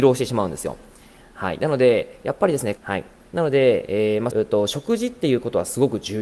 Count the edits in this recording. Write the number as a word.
two